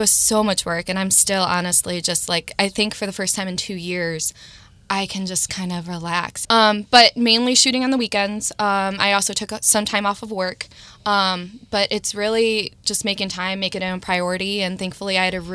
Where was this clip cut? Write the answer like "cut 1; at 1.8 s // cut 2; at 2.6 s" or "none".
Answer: cut 1; at 6.4 s